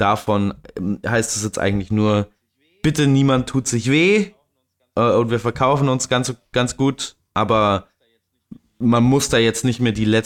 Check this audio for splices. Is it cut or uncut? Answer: uncut